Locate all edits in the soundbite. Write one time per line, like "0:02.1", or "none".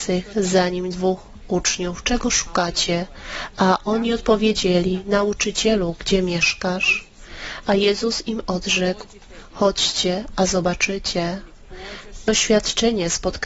0:12.3